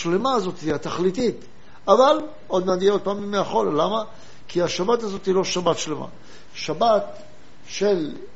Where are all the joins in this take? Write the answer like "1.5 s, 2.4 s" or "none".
none